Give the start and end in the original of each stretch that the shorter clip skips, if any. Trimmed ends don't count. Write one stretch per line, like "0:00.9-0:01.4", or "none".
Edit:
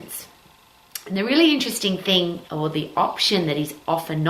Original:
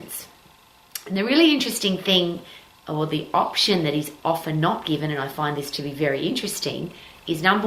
0:02.5-0:02.8